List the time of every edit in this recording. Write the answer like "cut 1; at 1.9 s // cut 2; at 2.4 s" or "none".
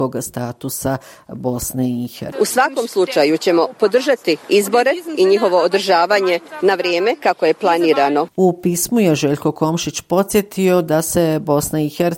cut 1; at 2.3 s // cut 2; at 8.3 s